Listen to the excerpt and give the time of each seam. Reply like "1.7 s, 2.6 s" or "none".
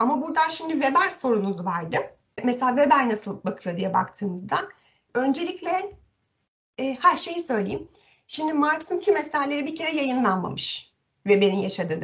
5.1 s